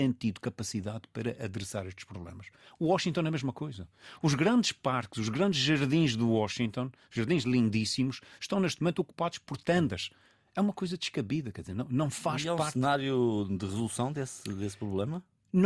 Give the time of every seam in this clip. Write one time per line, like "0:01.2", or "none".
none